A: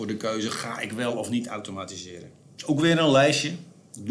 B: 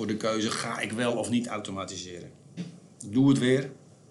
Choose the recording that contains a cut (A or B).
B